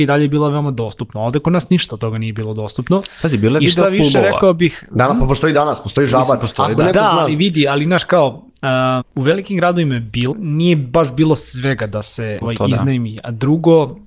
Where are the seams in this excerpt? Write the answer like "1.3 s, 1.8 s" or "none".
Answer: 9.0 s, 10.3 s, 12.4 s